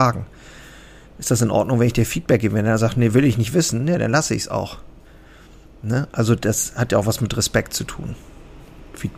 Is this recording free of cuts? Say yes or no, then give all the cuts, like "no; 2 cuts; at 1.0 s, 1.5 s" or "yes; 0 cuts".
yes; 0 cuts